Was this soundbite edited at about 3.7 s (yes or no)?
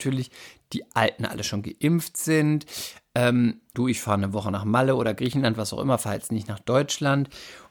yes